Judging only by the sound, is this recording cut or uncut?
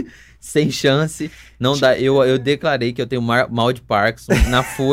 uncut